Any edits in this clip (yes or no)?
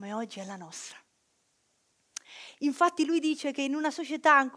yes